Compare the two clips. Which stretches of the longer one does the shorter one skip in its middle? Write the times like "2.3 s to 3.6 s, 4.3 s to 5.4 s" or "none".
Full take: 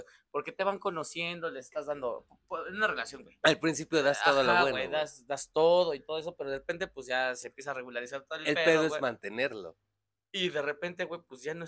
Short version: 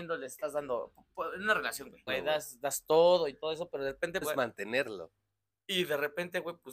3.4 s to 4.7 s, 6.9 s to 8.9 s

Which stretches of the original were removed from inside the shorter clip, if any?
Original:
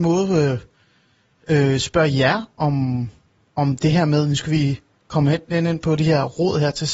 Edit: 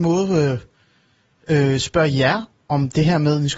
2.5 s to 3.4 s

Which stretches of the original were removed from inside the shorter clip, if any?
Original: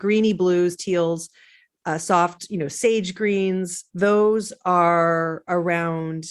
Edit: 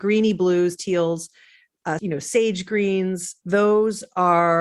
2.0 s to 2.5 s

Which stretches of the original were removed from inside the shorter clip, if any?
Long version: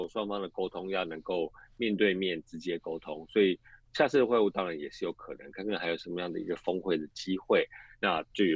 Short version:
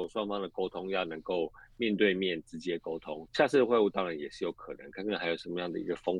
3.3 s to 3.9 s

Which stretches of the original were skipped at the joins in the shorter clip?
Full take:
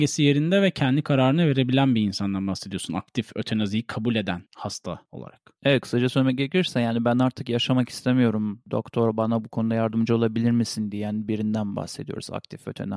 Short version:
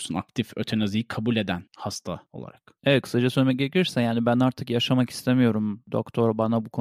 none

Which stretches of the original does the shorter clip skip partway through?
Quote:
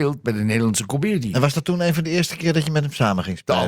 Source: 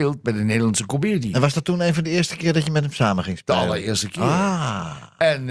none

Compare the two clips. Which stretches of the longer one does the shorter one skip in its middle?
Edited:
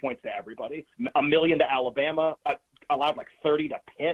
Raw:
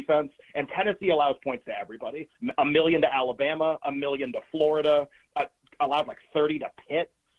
3.8 s to 5.3 s

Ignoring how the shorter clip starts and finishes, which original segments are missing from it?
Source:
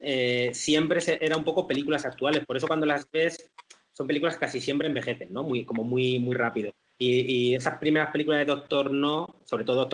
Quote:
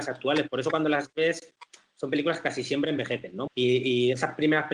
5.4 s to 6.9 s

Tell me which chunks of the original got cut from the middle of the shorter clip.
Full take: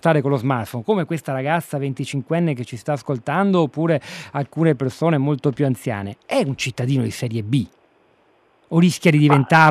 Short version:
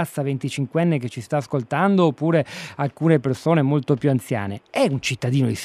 none

